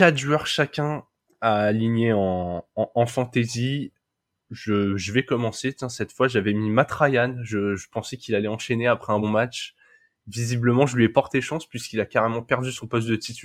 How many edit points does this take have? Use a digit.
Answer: 1